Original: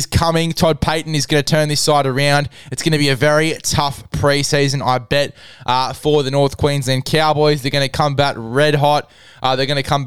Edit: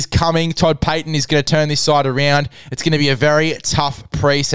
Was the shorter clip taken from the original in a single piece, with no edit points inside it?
yes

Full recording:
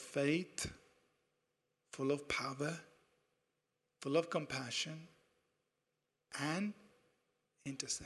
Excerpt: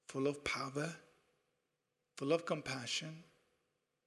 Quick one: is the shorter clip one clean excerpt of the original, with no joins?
yes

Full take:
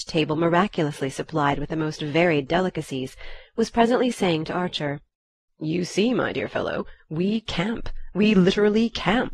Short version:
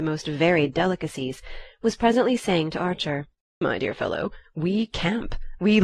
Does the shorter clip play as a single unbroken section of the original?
no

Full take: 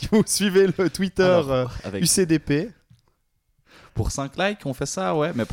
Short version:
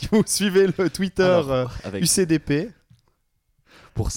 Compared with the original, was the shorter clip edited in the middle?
no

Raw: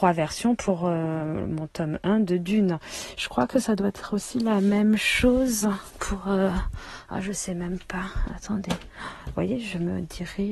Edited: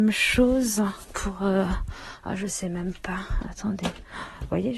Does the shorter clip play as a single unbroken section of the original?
yes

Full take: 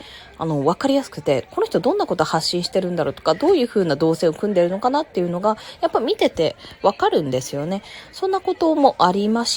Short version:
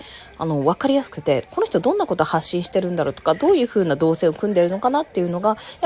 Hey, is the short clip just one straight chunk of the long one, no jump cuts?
yes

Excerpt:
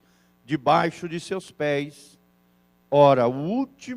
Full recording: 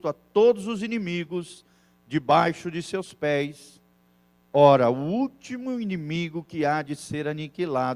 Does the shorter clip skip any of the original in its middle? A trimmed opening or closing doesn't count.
no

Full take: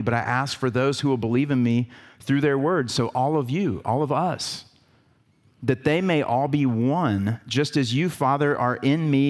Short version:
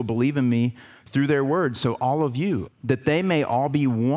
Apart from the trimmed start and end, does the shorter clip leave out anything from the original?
yes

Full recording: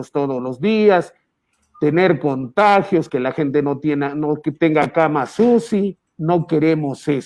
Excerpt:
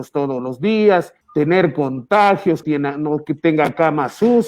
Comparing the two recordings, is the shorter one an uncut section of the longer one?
no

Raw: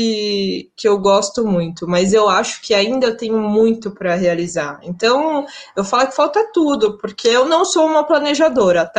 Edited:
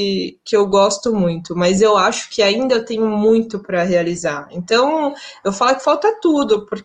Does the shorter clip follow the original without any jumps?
yes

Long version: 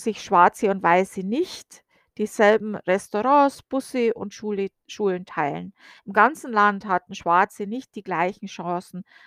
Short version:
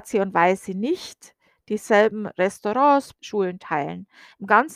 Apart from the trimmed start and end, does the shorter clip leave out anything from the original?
yes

